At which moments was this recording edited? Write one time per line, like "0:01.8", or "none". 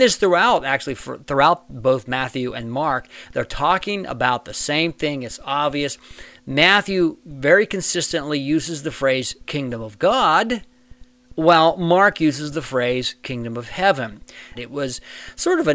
0:14.5